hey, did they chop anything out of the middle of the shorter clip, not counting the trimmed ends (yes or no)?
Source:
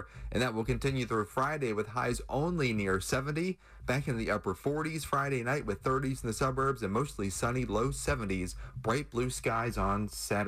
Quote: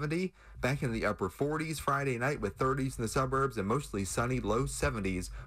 no